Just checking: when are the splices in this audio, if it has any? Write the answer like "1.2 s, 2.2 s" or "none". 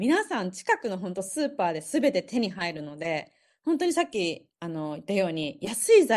none